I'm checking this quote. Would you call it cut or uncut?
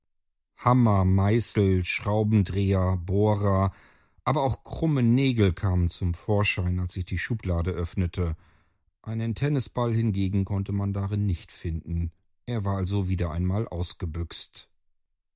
uncut